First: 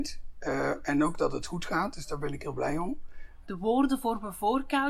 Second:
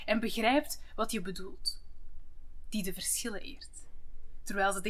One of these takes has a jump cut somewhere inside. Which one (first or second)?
first